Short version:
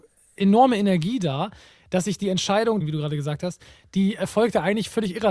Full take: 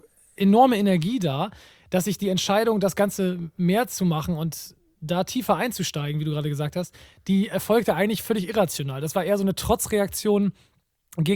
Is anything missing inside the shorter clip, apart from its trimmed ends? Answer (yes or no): yes